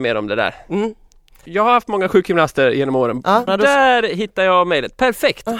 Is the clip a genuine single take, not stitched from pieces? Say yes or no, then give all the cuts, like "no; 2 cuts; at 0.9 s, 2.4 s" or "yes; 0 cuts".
no; 2 cuts; at 1.4 s, 3.5 s